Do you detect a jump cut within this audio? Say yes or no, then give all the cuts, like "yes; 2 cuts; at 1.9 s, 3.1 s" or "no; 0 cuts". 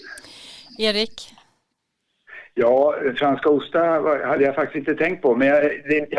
no; 0 cuts